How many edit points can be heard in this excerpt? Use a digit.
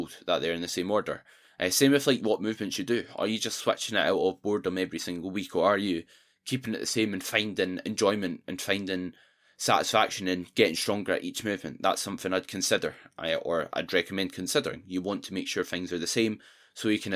0